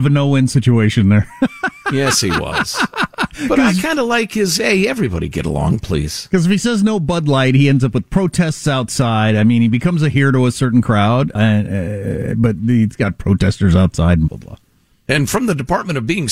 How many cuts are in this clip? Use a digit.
2